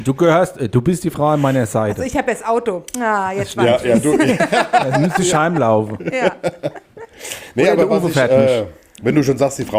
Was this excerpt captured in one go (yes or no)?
yes